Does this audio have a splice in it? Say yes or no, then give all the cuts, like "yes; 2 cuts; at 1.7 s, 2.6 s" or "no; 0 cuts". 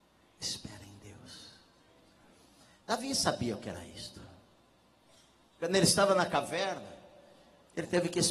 no; 0 cuts